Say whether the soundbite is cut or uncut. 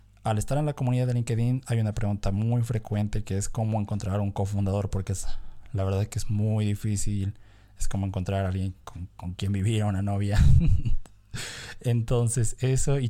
uncut